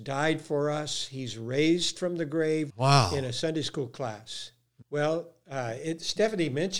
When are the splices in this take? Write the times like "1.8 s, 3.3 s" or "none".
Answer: 2.7 s, 4.8 s